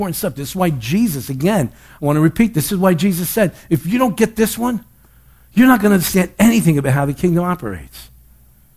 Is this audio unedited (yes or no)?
yes